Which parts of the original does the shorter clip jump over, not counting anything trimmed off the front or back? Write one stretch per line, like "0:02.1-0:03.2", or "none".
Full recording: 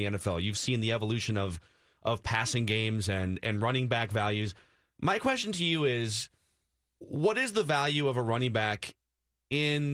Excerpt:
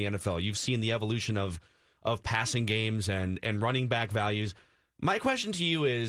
none